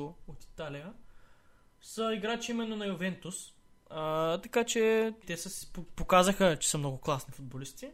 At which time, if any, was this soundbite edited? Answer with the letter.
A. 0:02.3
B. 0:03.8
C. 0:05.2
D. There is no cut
C